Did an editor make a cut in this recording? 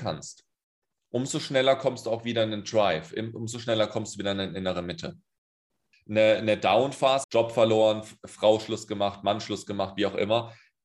yes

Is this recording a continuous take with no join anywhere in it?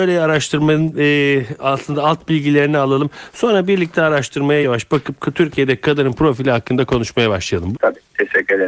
no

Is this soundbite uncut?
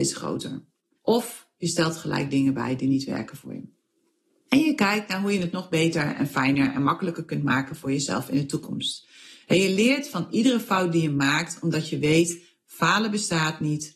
no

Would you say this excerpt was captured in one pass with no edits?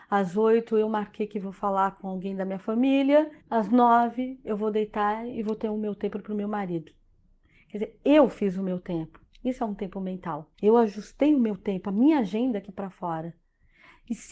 no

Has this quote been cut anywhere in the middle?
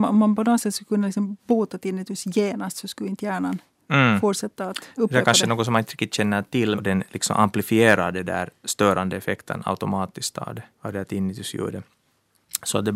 yes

